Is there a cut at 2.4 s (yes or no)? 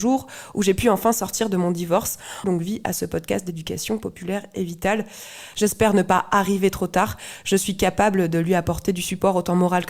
yes